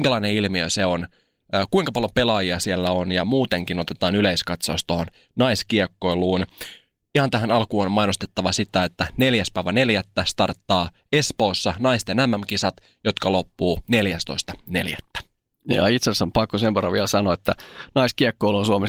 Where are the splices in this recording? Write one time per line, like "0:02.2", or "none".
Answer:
none